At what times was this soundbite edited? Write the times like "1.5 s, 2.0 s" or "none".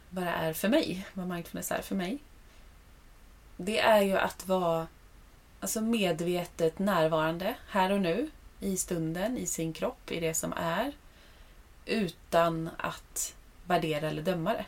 none